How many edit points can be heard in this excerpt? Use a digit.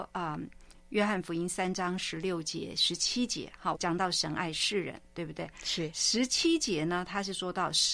1